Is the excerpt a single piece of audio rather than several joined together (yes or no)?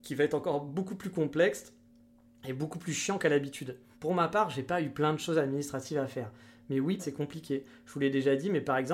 no